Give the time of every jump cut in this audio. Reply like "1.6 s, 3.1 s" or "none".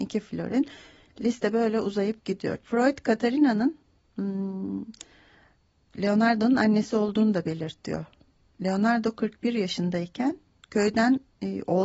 2.6 s